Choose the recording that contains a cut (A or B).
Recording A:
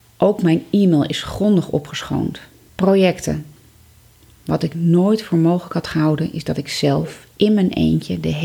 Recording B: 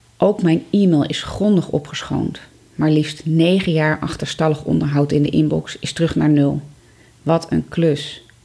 A